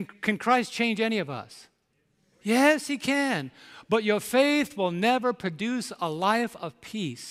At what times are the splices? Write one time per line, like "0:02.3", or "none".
none